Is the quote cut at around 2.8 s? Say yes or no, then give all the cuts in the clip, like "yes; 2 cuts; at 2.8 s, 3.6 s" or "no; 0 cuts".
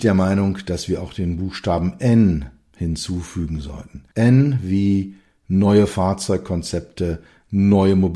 no; 1 cut; at 4.1 s